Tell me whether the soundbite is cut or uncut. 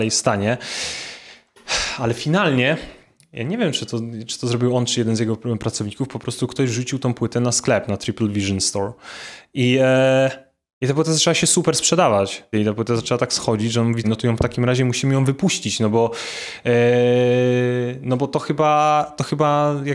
cut